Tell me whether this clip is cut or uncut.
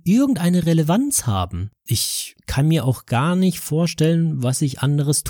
cut